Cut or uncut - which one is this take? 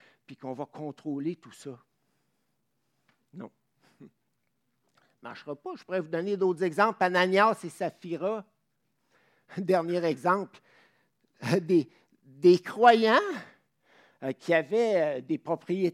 uncut